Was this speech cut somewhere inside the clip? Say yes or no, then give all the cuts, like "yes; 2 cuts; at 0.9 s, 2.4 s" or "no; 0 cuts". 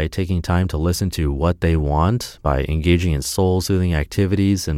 no; 0 cuts